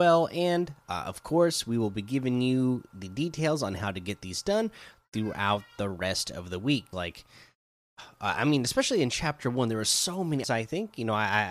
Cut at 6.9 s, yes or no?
yes